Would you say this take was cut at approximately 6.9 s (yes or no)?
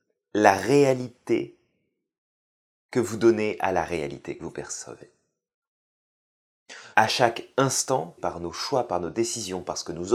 yes